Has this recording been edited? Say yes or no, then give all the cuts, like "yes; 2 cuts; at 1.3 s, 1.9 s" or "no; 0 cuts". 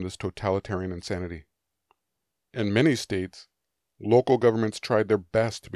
no; 0 cuts